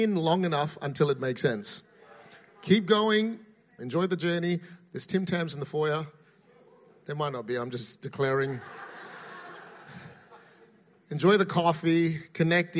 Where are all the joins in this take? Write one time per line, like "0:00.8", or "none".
0:03.8